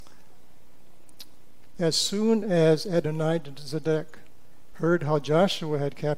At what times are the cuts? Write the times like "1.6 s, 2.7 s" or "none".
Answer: 1.7 s, 4.7 s